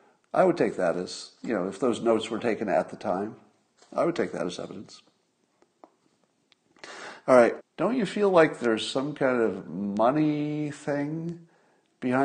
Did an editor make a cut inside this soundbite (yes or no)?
yes